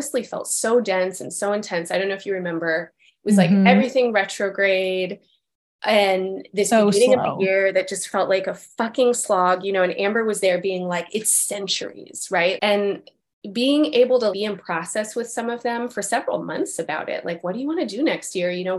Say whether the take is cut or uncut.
cut